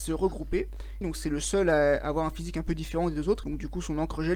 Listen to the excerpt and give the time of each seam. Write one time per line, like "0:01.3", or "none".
0:01.0
0:03.4